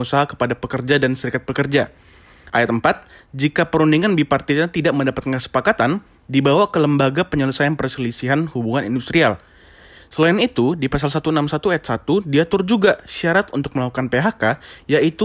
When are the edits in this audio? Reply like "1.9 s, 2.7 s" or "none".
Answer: 2.5 s